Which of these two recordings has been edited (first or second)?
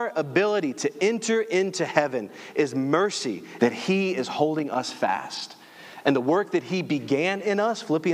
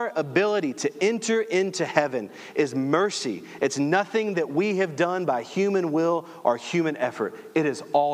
first